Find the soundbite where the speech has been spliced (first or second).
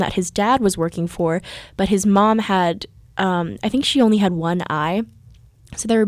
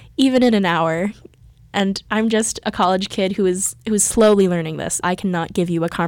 second